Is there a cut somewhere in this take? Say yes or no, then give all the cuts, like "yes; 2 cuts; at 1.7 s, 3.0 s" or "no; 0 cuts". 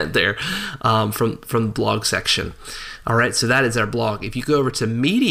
no; 0 cuts